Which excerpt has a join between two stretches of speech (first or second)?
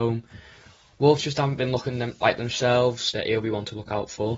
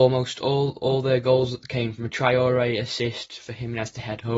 first